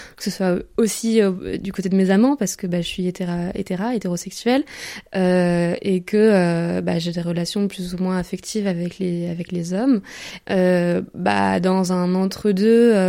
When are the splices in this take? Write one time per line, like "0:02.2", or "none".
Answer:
0:10.4